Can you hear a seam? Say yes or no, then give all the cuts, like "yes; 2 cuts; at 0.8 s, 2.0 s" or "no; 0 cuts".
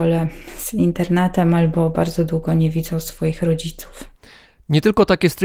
no; 0 cuts